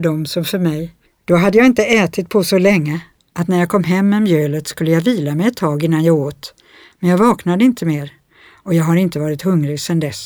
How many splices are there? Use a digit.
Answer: 1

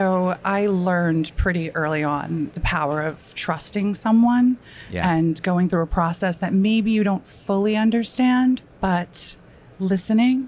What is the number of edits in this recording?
0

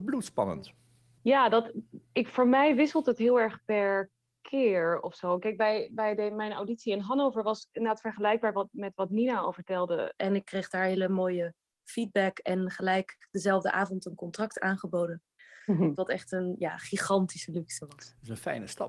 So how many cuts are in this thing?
2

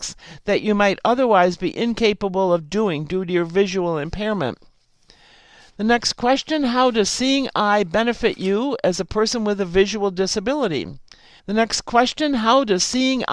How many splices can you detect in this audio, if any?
1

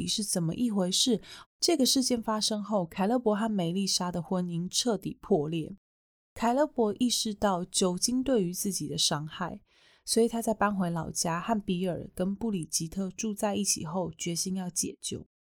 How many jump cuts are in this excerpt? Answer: 1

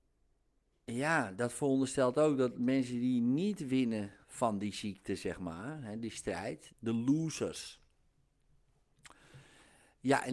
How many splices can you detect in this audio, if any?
2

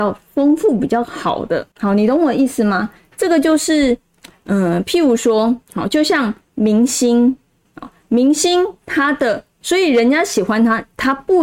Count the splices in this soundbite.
1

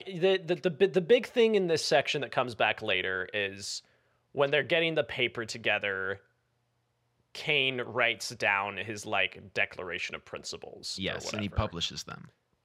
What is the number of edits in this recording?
0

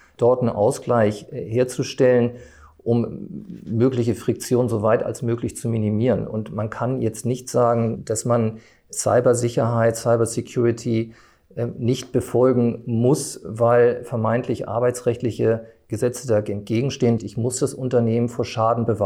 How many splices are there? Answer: 1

